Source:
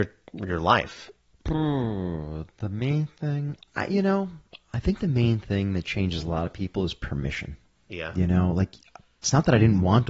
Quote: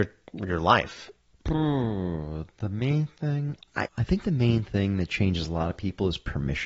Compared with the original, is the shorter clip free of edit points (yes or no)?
no